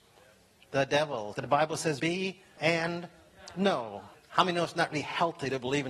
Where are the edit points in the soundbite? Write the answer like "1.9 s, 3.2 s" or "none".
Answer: 1.3 s, 2.6 s, 4.1 s

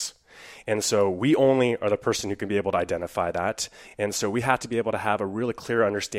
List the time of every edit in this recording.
none

